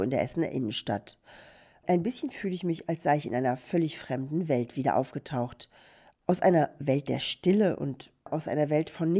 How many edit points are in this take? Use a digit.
0